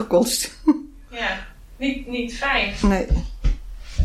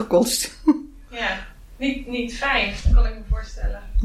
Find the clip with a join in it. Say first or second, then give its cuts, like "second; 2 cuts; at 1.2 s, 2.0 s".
second; 1 cut; at 2.8 s